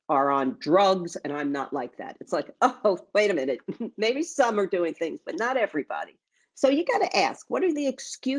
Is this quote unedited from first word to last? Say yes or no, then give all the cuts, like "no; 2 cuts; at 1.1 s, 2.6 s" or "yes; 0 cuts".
yes; 0 cuts